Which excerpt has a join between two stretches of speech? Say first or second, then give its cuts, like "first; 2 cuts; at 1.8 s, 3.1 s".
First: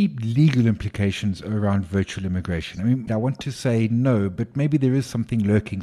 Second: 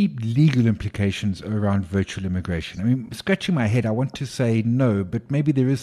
first; 1 cut; at 3.1 s